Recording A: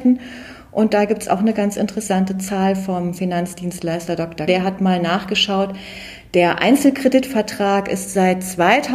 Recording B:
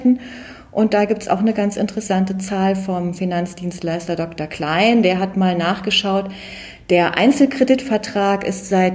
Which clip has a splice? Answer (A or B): A